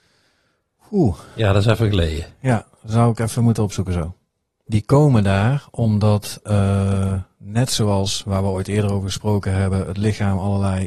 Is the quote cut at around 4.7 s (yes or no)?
yes